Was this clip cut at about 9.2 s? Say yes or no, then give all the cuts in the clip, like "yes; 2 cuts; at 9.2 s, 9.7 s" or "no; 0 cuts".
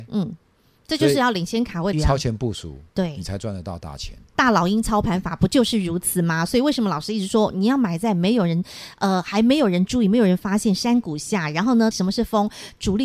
no; 2 cuts; at 1.9 s, 11.9 s